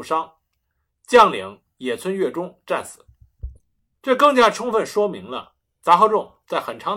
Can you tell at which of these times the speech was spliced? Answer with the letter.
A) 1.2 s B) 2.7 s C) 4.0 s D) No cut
C